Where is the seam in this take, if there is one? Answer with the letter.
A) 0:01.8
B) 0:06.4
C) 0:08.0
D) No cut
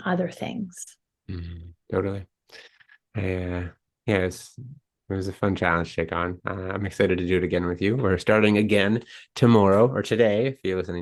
A